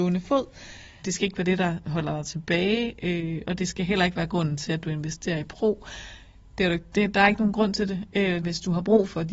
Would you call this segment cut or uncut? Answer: cut